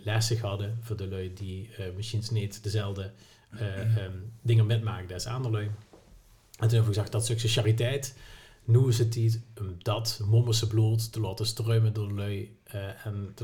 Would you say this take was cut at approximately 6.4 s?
no; 0 cuts

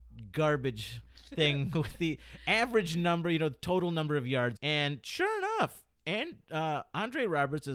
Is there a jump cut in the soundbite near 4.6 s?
yes; 1 cut; at 4.6 s

